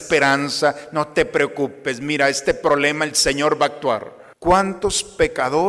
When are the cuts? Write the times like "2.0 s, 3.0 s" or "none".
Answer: 4.3 s